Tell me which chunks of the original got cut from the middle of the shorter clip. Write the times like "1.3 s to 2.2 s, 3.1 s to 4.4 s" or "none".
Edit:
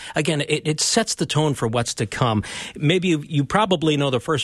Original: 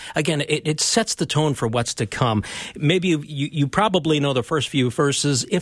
3.3 s to 3.5 s